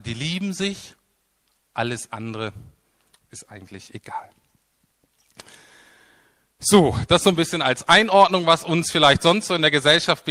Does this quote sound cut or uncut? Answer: uncut